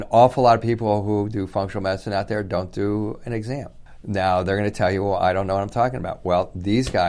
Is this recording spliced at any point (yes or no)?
no